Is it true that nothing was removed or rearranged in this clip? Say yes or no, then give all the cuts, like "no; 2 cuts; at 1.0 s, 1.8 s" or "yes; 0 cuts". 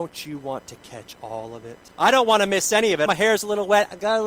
no; 2 cuts; at 1.9 s, 3.1 s